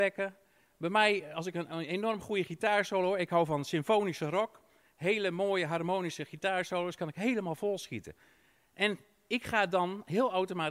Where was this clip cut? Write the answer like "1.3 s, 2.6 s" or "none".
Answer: none